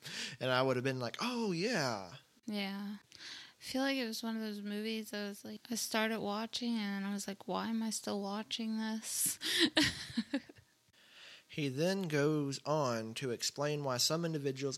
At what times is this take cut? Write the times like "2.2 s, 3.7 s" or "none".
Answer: 3.0 s